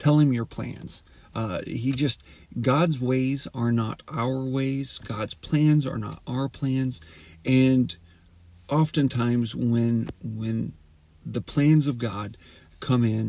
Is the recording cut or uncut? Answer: uncut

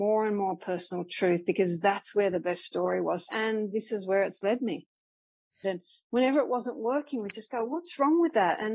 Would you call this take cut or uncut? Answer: cut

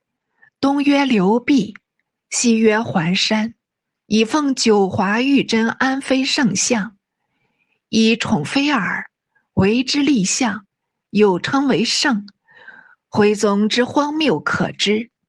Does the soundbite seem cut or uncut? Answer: cut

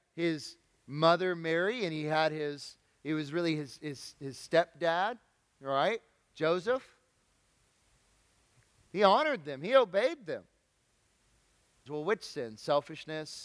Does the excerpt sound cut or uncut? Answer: cut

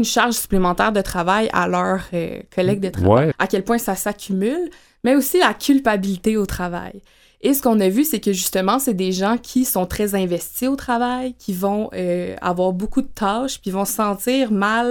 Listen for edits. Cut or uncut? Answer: cut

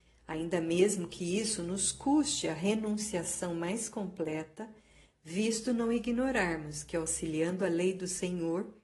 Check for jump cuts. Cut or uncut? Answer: uncut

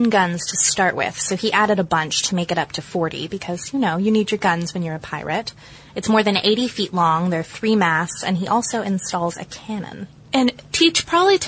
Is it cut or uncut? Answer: uncut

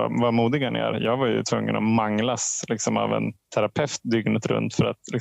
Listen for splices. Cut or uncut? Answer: uncut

